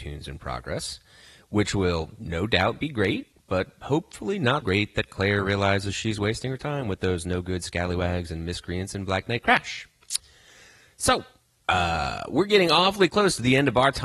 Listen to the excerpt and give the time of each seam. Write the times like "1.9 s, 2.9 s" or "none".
4.6 s